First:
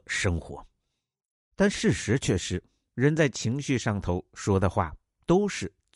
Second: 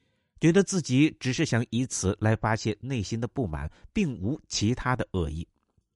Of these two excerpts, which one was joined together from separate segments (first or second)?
first